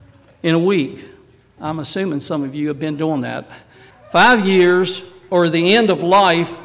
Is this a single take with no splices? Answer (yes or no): no